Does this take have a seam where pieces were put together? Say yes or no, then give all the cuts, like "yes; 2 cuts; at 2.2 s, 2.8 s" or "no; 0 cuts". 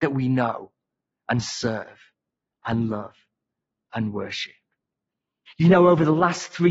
yes; 1 cut; at 5.5 s